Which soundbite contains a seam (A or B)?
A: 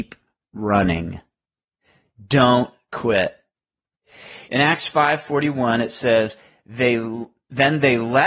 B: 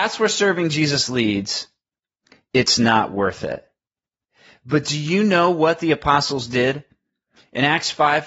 A